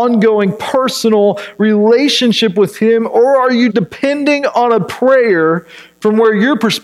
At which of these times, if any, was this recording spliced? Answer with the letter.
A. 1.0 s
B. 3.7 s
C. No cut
B